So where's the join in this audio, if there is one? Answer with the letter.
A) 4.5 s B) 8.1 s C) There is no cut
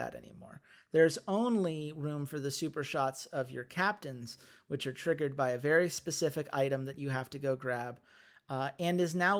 C